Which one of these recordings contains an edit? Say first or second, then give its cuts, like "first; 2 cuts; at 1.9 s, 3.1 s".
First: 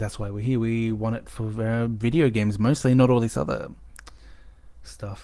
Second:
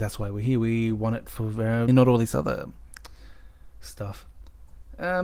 second; 1 cut; at 1.9 s